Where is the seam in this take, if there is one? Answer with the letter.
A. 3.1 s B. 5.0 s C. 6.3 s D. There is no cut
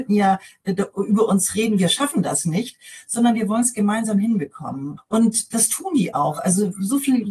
B